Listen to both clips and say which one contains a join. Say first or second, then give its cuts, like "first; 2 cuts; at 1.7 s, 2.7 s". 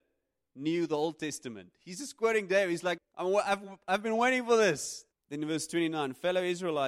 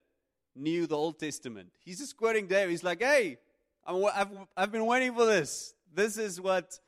first; 2 cuts; at 3.0 s, 5.1 s